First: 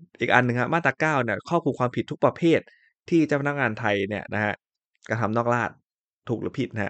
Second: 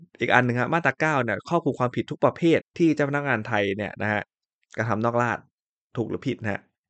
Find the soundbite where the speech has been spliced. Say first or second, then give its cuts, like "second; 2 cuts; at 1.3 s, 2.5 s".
second; 1 cut; at 2.6 s